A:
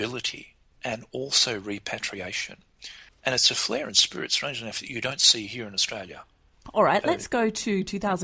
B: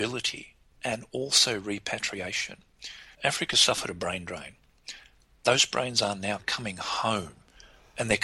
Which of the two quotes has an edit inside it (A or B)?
A